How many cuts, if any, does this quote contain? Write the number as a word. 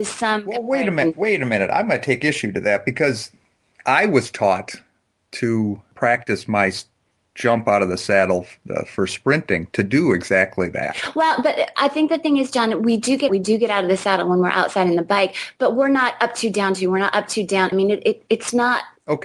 two